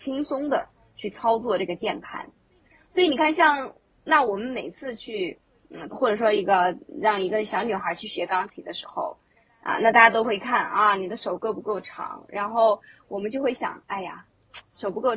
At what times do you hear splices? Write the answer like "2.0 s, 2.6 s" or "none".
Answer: 5.9 s